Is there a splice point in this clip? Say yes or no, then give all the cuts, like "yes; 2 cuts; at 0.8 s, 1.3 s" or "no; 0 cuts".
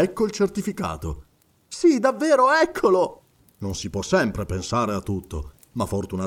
yes; 1 cut; at 3.5 s